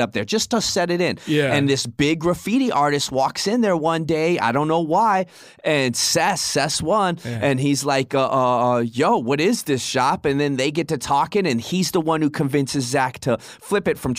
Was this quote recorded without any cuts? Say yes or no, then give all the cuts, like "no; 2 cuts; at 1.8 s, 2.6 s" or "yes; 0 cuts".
yes; 0 cuts